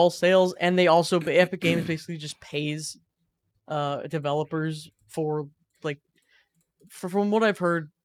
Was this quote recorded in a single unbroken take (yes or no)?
yes